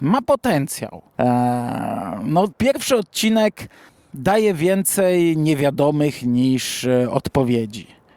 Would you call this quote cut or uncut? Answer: cut